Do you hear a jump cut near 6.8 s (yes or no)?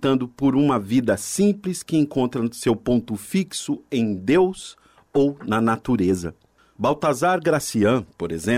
yes